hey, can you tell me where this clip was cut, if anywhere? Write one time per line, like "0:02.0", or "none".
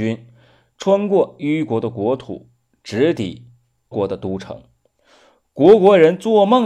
0:03.9